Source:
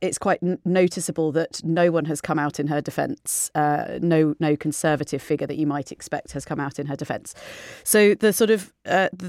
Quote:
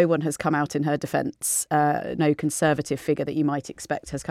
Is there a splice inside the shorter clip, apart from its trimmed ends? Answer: yes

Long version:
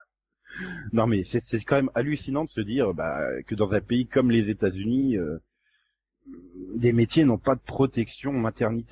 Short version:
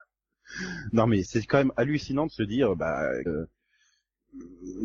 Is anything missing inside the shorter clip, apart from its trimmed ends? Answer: yes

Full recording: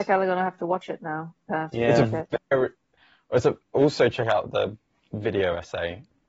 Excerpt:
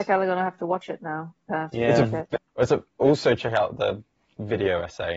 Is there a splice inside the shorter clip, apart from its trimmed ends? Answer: yes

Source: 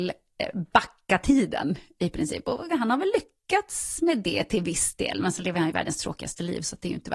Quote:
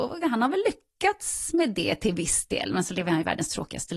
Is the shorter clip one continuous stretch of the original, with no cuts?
yes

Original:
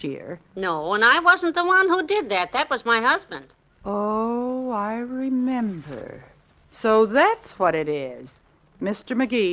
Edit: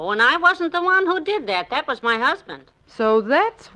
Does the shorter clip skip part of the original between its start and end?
yes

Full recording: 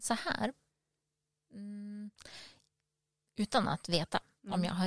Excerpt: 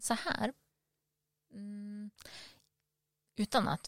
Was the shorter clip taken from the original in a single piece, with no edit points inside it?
yes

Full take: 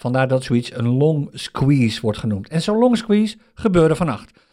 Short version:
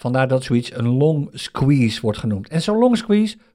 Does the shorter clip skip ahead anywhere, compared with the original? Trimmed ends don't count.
no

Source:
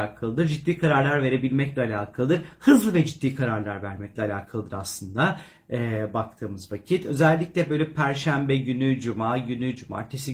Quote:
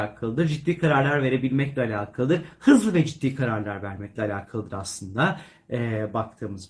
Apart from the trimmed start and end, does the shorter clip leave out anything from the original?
no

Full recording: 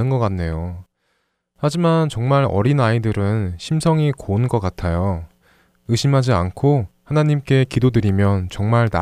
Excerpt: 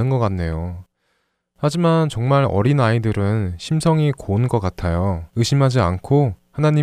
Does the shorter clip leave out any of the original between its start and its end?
yes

